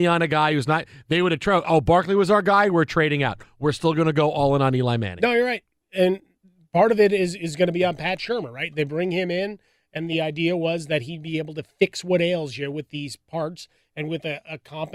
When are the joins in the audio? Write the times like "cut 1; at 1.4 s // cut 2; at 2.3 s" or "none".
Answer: none